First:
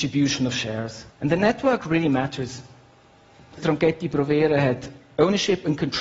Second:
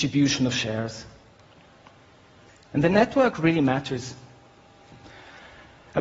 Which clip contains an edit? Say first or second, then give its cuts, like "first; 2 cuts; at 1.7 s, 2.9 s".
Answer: first; 2 cuts; at 1.1 s, 3.6 s